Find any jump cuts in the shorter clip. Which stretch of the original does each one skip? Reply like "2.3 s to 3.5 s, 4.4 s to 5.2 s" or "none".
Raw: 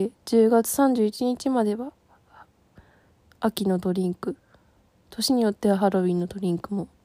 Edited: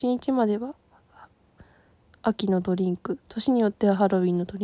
4.4 s to 5.0 s